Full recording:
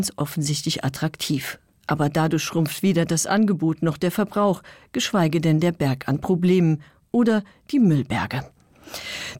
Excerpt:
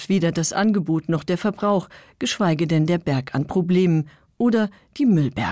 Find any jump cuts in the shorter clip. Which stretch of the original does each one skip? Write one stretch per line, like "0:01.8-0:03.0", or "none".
none